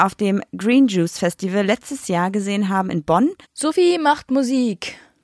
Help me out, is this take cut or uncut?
cut